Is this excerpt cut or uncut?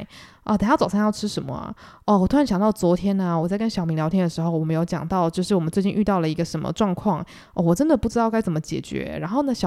uncut